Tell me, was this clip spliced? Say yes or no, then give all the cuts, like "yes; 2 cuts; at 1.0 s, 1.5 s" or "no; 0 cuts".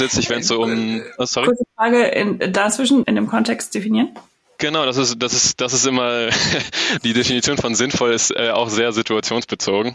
yes; 1 cut; at 3.0 s